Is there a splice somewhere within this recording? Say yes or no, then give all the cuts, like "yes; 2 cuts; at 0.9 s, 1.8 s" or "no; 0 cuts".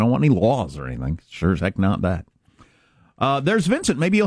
no; 0 cuts